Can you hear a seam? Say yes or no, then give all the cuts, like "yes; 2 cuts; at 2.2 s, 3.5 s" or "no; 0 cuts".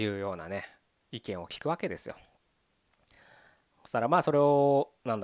no; 0 cuts